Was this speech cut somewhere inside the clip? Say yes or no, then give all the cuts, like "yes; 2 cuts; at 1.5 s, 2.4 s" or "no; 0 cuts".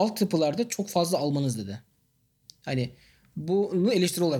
no; 0 cuts